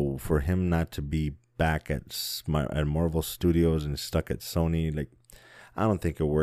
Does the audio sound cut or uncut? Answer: uncut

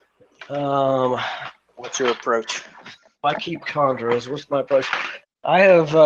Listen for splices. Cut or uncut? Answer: uncut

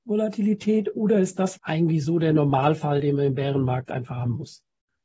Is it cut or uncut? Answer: cut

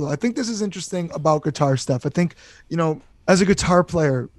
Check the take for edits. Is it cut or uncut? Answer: cut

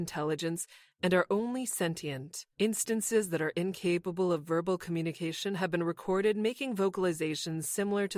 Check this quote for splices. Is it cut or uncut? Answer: cut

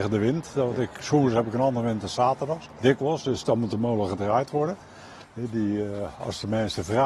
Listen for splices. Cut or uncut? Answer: cut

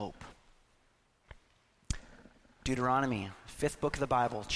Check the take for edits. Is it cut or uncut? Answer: cut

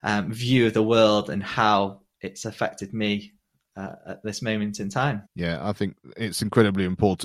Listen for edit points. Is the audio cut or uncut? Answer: cut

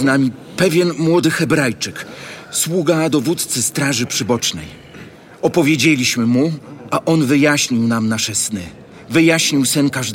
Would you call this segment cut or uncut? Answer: uncut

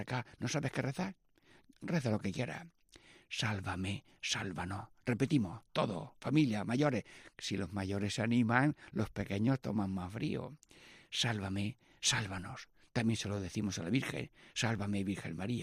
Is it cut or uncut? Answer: uncut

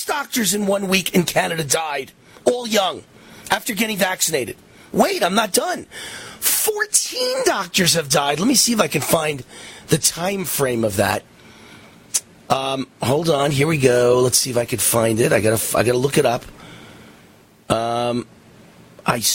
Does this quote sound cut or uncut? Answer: uncut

